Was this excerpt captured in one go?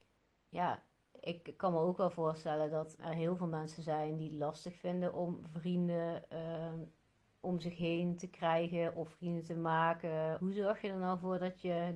no; 2 cuts; at 3.0 s, 10.4 s

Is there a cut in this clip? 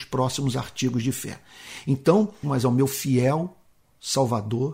yes; 1 cut; at 2.4 s

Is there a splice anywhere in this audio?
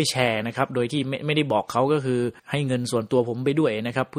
yes; 1 cut; at 2.4 s

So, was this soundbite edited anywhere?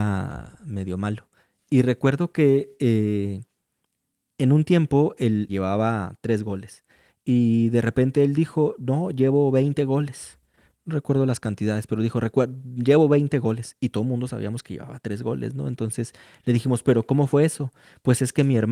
yes; 1 cut; at 5.5 s

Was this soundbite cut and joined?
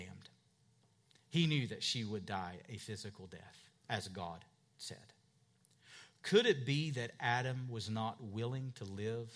no; 0 cuts

